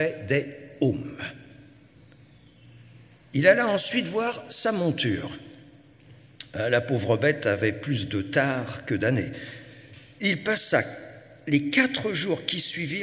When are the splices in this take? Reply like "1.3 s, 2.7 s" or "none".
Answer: none